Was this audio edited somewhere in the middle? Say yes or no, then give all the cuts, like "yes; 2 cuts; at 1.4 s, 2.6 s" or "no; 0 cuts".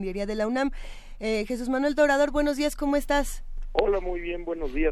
no; 0 cuts